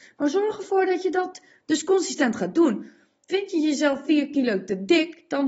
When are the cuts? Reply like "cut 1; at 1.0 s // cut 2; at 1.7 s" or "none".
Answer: none

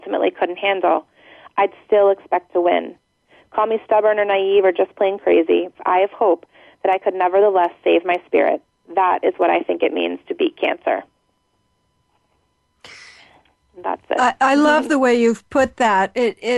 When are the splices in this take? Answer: cut 1; at 5.7 s

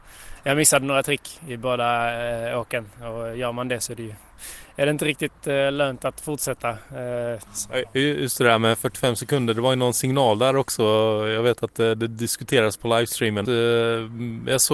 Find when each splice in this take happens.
cut 1; at 7.5 s // cut 2; at 13.4 s

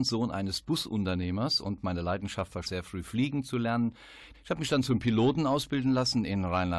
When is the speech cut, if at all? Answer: cut 1; at 2.6 s // cut 2; at 4.3 s

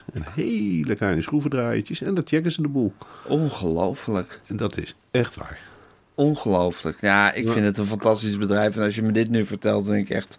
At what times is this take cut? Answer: none

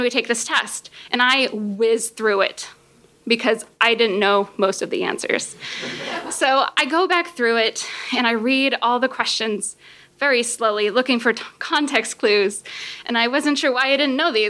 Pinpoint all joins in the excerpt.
none

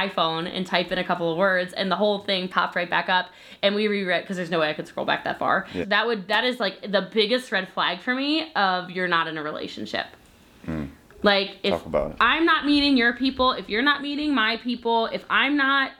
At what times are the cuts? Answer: cut 1; at 5.8 s

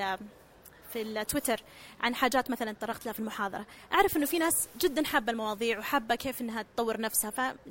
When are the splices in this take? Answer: none

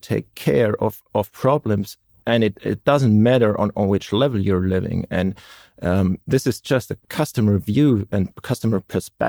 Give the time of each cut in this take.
none

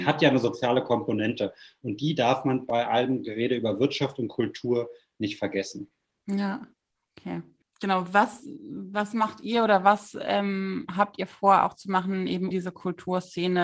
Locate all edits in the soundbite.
cut 1; at 12.5 s

